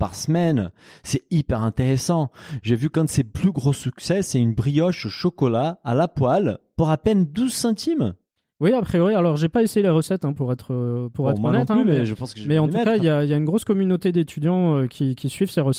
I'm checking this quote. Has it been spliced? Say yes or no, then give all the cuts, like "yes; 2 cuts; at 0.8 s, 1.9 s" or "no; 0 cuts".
no; 0 cuts